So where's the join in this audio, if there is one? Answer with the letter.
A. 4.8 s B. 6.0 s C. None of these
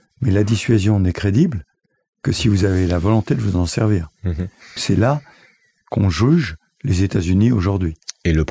A